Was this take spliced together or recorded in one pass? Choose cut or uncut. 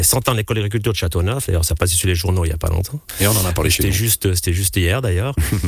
uncut